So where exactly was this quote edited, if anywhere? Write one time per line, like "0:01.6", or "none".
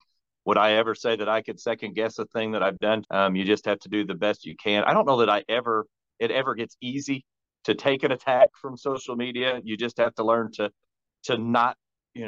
0:03.0